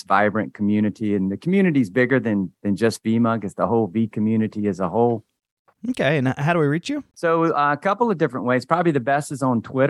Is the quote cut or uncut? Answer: cut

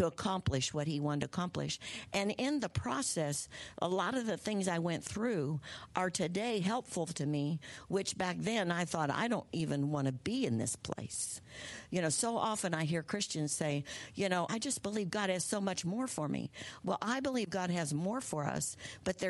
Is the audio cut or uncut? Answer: cut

